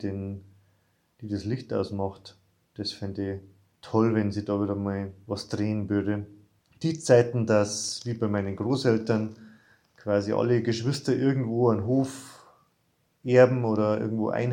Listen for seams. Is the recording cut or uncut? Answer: uncut